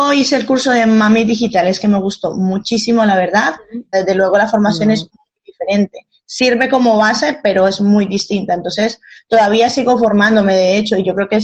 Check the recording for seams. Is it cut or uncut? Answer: cut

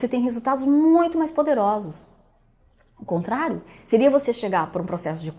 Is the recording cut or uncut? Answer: uncut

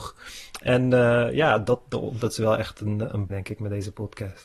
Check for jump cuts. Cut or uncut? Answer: cut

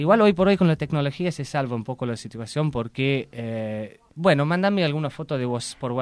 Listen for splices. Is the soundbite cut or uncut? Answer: cut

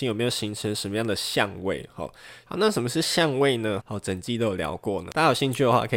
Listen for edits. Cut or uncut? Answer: cut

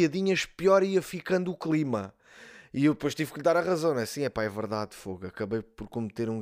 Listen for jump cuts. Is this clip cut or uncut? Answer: uncut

